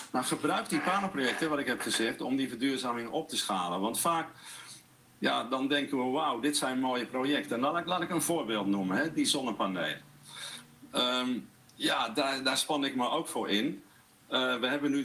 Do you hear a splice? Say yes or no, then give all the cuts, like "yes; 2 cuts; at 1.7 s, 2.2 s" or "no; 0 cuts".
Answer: no; 0 cuts